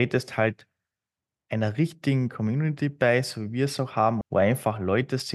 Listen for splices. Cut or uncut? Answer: cut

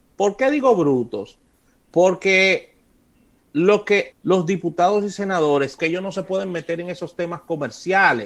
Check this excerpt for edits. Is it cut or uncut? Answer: cut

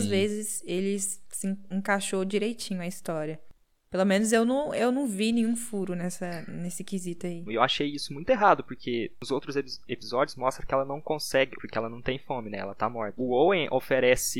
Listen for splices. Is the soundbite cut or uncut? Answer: cut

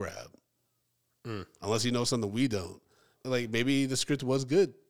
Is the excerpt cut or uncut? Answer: cut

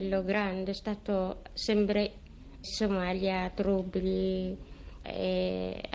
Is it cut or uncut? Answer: cut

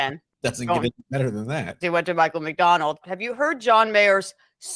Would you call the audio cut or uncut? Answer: cut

